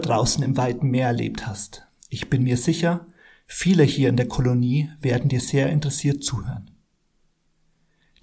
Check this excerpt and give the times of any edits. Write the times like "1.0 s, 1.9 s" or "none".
none